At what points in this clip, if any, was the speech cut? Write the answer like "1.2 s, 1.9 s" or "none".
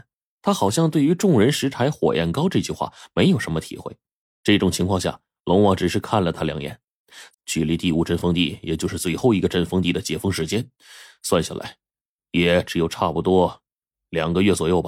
7.3 s